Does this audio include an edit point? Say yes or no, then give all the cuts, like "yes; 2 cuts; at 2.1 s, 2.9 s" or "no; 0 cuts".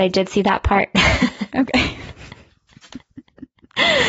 no; 0 cuts